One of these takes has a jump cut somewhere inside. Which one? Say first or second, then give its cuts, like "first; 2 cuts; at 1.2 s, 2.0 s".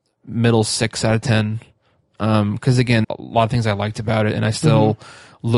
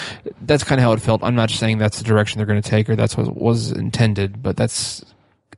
first; 1 cut; at 3.0 s